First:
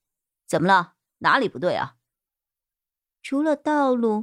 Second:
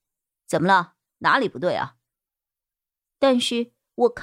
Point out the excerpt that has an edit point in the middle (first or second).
second